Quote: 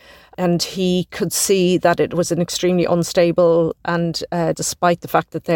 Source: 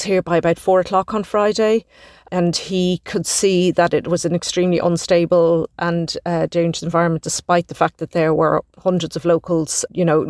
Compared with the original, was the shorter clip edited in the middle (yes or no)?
yes